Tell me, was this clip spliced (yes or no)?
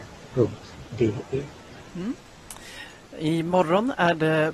yes